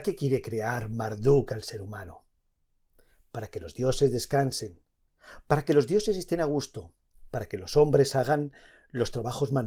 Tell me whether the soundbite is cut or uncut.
uncut